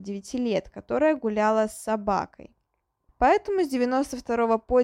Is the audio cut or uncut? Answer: cut